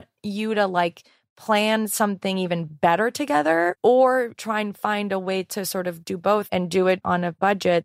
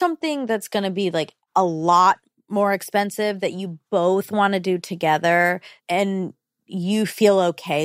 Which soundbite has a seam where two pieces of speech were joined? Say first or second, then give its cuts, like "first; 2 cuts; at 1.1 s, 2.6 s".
second; 1 cut; at 5.8 s